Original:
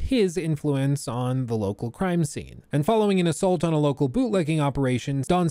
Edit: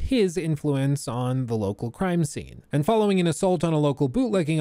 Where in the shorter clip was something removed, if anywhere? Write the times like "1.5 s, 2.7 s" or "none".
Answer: none

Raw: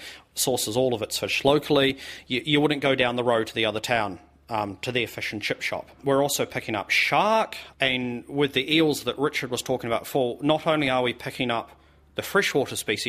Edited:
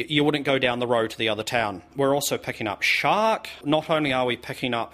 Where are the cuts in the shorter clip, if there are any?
1.9 s, 3.6 s

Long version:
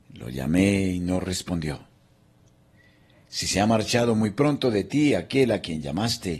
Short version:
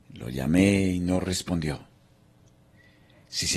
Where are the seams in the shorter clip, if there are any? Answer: none

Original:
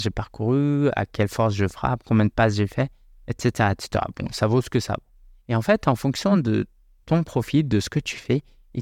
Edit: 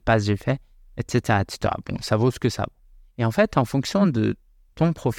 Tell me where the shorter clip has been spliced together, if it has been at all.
none

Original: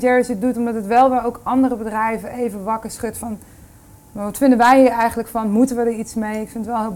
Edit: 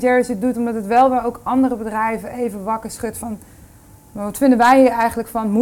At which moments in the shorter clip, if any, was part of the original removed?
none

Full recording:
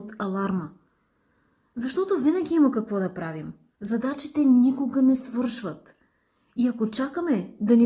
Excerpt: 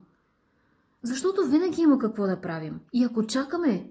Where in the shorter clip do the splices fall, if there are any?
2.9 s

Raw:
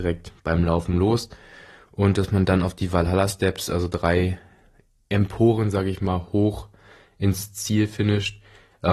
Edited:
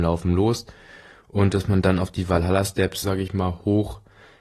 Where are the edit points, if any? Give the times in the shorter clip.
3.0 s

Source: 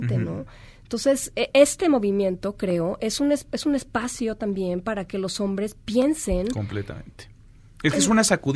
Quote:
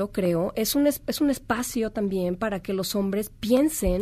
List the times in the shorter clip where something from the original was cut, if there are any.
none

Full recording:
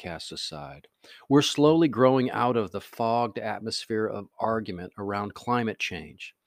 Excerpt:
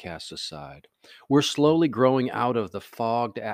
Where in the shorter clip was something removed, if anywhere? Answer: none

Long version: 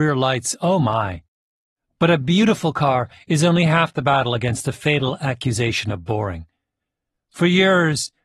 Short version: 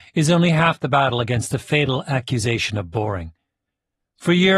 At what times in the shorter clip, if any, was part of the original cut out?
none

